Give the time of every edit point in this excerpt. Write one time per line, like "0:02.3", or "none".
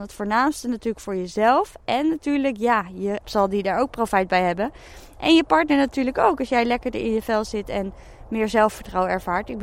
0:03.2